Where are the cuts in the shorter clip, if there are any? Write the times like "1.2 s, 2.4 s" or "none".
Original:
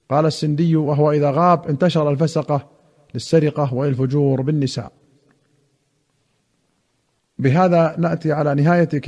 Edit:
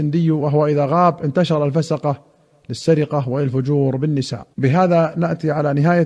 4.5 s